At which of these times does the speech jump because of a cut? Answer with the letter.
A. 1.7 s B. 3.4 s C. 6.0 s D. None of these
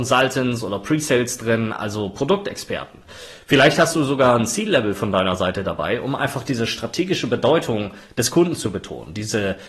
D